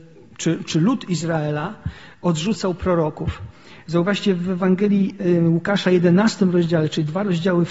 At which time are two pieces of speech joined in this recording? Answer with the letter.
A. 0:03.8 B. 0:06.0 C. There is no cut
C